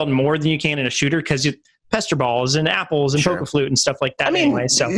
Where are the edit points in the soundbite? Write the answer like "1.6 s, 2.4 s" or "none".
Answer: none